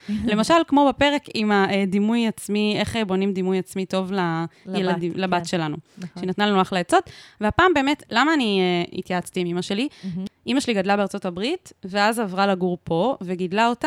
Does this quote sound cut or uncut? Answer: cut